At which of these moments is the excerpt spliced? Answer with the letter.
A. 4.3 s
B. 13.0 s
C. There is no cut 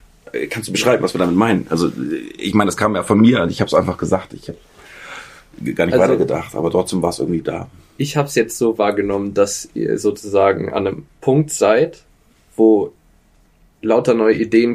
C